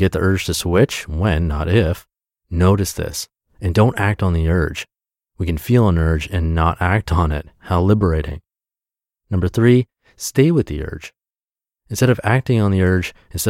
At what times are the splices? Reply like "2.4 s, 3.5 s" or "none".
none